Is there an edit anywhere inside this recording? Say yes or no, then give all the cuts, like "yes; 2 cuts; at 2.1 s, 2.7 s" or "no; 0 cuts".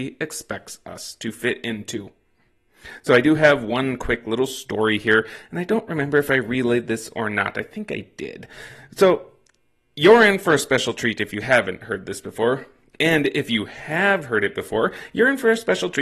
no; 0 cuts